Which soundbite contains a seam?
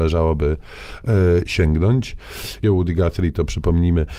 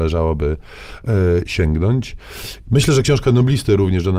first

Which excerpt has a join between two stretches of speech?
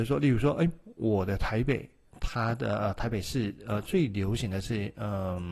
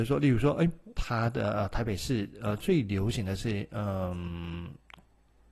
second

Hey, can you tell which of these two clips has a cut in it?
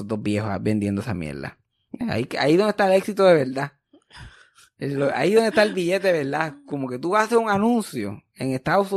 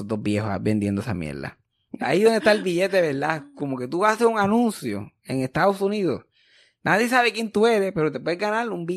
second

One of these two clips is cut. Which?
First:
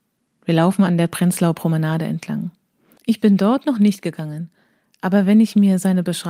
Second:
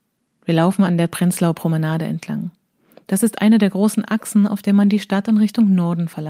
first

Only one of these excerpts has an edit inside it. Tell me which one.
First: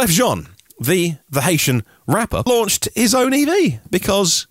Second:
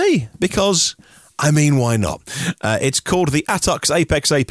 first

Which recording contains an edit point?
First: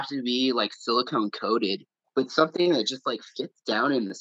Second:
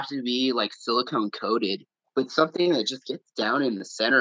second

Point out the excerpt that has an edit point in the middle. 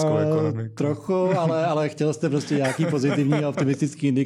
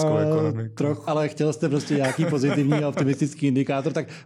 second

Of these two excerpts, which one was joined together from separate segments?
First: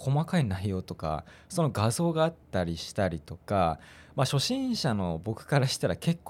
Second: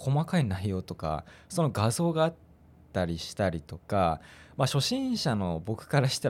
first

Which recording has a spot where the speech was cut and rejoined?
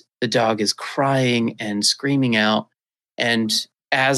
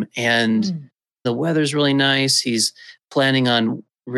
second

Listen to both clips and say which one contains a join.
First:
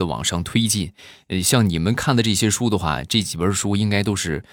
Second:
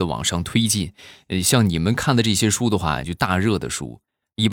second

